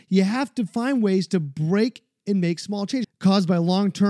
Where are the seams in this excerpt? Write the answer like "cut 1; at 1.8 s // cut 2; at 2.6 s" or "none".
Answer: cut 1; at 3.0 s